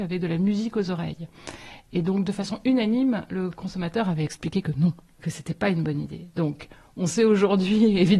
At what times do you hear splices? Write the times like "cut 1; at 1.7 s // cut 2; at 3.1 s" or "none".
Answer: none

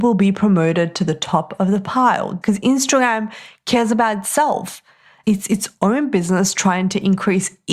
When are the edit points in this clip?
cut 1; at 2.4 s // cut 2; at 5.2 s

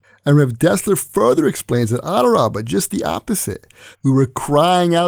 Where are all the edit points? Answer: cut 1; at 3.9 s

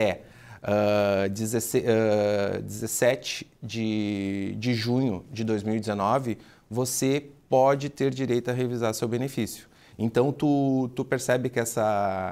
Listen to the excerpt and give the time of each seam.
cut 1; at 9.9 s // cut 2; at 10.9 s

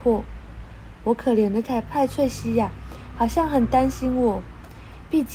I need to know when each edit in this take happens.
cut 1; at 1.6 s

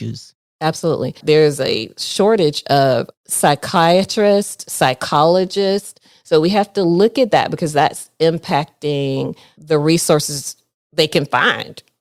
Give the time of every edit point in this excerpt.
cut 1; at 1.2 s

